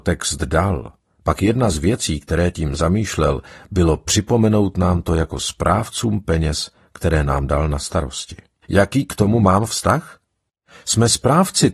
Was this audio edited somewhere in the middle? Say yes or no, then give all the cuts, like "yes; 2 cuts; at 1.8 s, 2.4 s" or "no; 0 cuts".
yes; 1 cut; at 8.6 s